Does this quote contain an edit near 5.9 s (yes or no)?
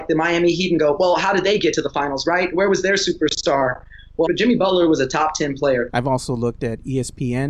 yes